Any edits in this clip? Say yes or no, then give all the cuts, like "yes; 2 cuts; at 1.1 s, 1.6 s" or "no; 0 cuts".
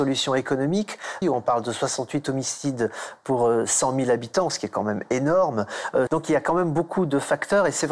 yes; 2 cuts; at 1.2 s, 6.1 s